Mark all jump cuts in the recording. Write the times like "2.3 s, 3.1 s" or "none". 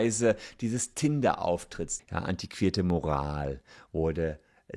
2.0 s